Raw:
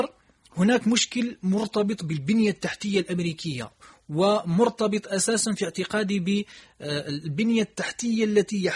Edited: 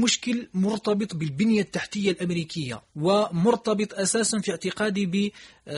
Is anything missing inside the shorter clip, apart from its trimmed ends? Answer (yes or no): yes